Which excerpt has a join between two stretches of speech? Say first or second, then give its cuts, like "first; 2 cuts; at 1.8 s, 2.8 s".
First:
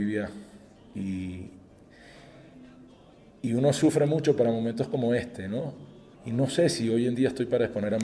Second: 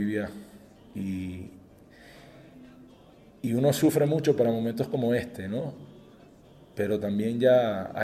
first; 1 cut; at 6.1 s